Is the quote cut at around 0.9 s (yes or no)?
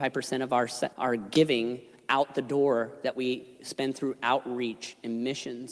yes